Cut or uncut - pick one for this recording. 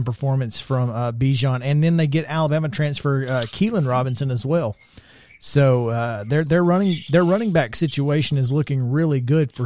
uncut